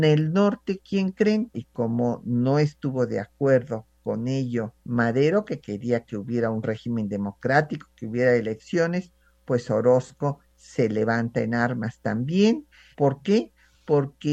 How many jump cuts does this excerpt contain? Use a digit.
3